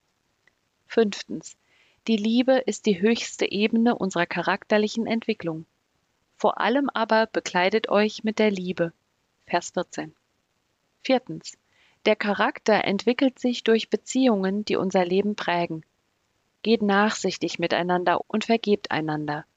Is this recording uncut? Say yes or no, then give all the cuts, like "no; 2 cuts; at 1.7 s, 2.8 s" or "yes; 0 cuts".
no; 2 cuts; at 10.9 s, 18.2 s